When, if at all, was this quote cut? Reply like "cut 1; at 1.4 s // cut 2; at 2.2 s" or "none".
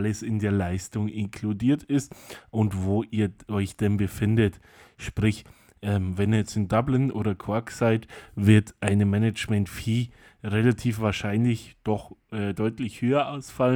none